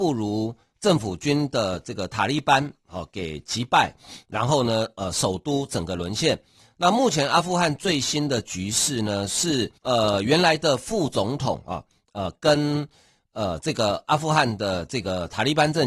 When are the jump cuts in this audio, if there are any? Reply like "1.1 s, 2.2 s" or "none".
9.8 s, 12.0 s